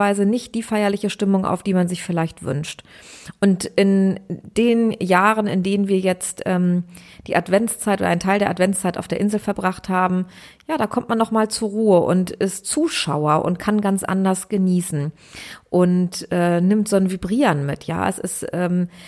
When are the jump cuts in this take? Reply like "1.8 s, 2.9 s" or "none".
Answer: none